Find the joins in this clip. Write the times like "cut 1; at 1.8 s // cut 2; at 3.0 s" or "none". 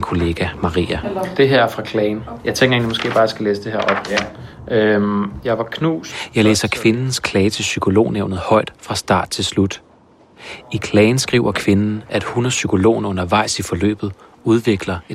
cut 1; at 1.0 s